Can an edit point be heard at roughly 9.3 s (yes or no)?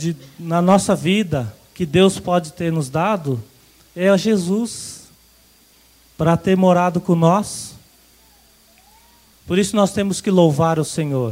yes